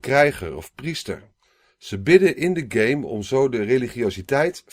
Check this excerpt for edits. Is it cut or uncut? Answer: uncut